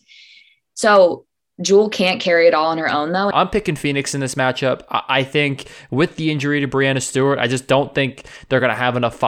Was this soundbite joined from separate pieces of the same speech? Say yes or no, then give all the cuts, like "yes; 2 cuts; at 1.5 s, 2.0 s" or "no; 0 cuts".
yes; 1 cut; at 3.3 s